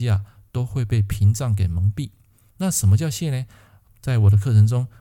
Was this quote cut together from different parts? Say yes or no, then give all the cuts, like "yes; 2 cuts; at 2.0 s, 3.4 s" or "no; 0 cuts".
no; 0 cuts